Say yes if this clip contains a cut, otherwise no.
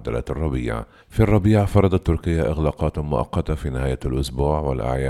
yes